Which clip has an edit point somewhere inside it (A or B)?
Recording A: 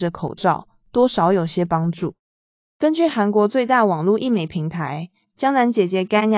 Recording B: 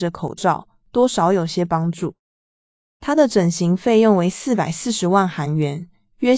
A